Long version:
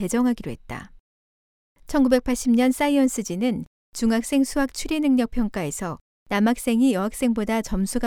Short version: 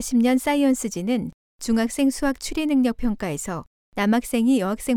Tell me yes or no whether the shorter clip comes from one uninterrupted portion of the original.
yes